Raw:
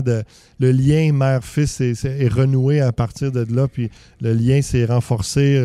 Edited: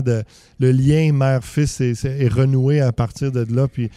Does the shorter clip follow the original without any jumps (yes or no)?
yes